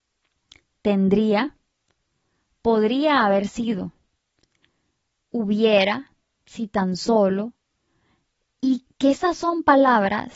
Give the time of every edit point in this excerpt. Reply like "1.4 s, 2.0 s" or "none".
8.9 s